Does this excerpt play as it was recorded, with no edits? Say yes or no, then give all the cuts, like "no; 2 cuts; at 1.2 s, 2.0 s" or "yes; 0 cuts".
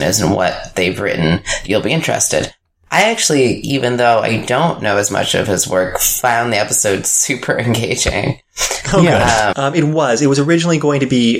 no; 1 cut; at 9.5 s